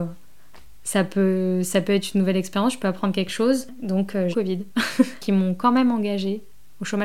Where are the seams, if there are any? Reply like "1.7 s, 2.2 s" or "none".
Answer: 4.3 s